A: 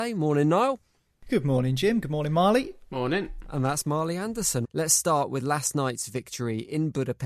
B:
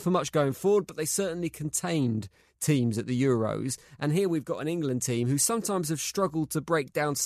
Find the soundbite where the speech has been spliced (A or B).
A